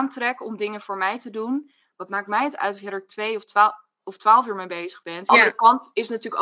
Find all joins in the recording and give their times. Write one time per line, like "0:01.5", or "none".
0:05.3